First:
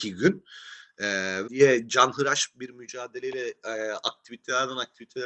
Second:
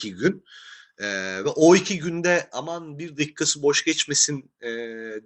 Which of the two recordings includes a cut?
first; 1 cut; at 1.4 s

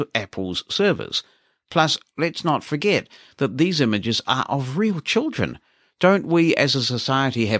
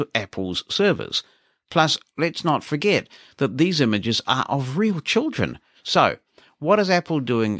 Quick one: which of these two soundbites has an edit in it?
second; 1 cut; at 5.7 s

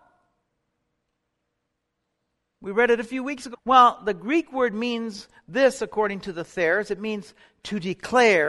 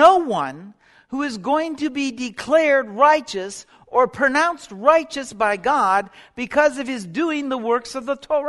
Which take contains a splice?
first; 1 cut; at 3.5 s

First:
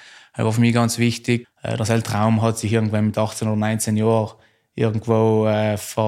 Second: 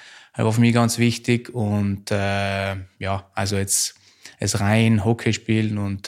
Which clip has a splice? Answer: first; 1 cut; at 1.4 s

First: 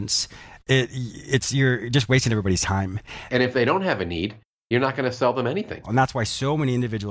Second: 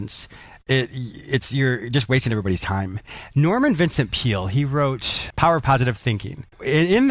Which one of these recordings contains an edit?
first; 2 cuts; at 3.3 s, 5.8 s

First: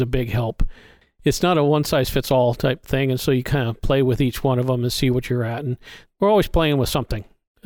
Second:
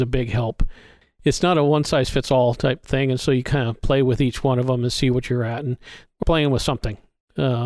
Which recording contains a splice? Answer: second; 1 cut; at 6.2 s

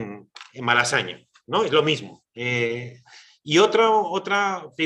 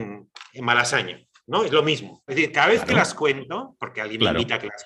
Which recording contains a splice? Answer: second; 1 cut; at 2.3 s

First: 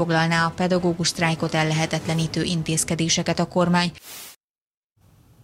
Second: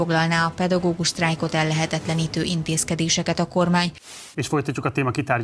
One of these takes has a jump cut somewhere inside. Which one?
second; 1 cut; at 4.3 s

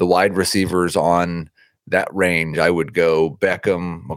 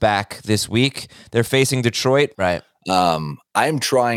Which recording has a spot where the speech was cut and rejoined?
second; 1 cut; at 2.3 s

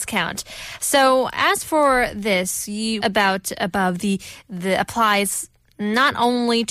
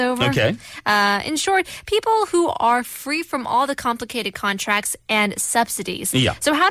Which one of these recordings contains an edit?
first; 1 cut; at 3.0 s

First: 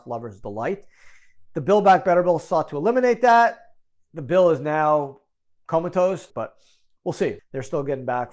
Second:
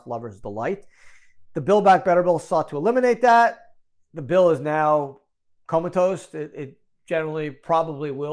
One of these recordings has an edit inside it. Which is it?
first; 2 cuts; at 6.3 s, 7.4 s

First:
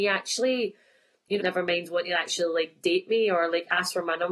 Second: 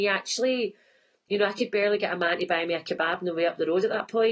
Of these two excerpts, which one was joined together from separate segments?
first; 1 cut; at 1.4 s

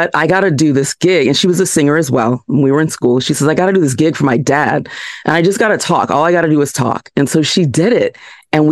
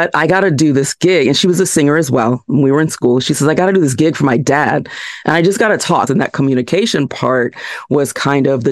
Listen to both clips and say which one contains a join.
second; 1 cut; at 6.1 s

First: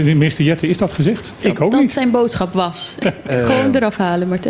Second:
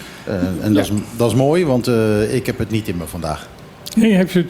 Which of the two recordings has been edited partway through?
first; 2 cuts; at 1.4 s, 3.0 s

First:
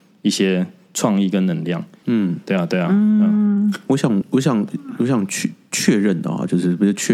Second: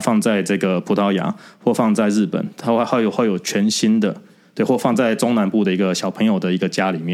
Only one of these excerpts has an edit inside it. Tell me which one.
first; 2 cuts; at 2.0 s, 4.2 s

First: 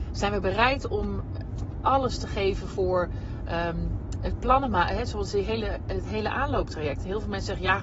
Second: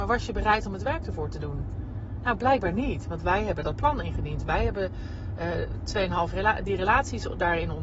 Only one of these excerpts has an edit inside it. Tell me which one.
second; 1 cut; at 6.3 s

